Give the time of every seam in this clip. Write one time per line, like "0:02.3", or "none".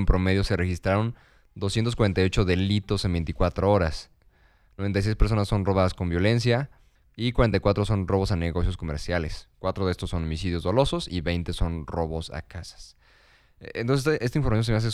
none